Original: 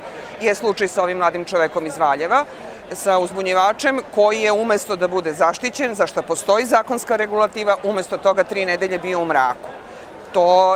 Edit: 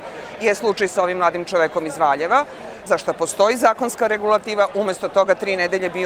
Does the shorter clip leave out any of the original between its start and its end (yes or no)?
yes